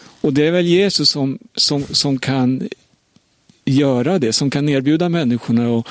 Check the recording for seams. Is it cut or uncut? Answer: uncut